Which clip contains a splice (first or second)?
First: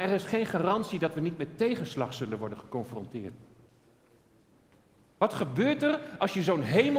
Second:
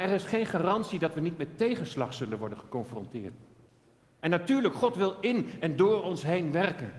second